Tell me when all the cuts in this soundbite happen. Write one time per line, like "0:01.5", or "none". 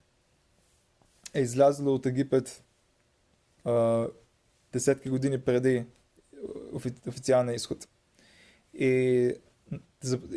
none